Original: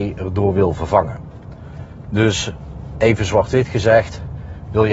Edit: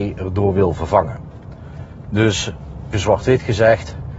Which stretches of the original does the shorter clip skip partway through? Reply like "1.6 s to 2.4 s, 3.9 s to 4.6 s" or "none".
2.9 s to 3.2 s